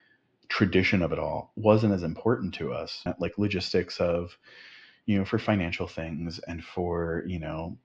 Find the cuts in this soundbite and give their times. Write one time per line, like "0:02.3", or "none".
0:03.1